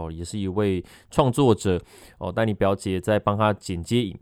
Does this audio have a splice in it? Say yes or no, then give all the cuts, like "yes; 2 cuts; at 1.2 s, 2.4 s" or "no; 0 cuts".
no; 0 cuts